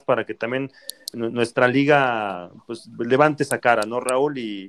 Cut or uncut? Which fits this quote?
cut